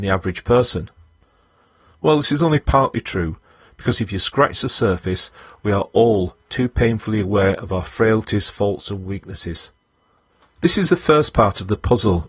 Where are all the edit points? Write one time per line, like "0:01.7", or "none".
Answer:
none